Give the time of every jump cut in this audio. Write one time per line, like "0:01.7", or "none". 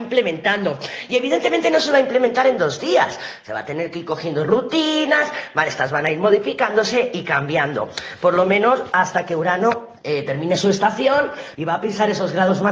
0:10.0
0:11.5